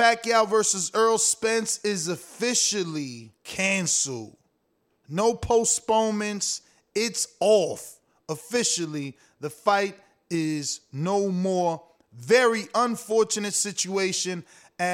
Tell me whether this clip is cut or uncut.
cut